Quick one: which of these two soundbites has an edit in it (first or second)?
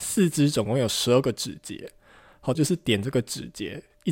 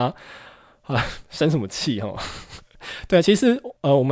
first